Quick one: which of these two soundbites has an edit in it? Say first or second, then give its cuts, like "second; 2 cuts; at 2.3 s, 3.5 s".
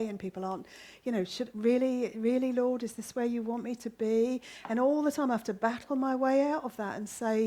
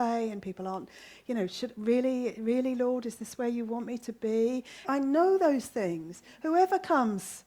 second; 1 cut; at 4.8 s